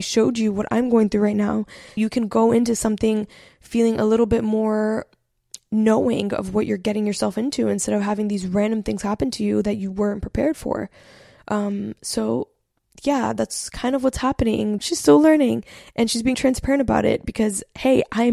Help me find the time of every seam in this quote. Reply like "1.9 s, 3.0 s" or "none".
2.0 s, 14.8 s, 16.3 s